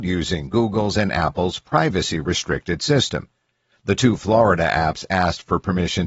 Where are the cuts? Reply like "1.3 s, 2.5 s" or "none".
none